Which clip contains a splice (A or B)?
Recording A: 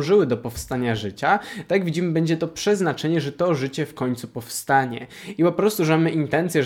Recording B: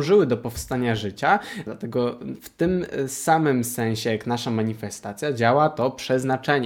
B